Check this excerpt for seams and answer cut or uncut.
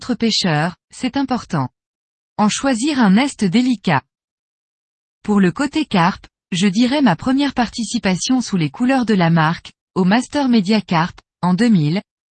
cut